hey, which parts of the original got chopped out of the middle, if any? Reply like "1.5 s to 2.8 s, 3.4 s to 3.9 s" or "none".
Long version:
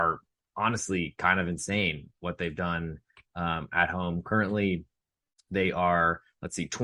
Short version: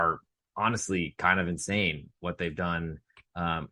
none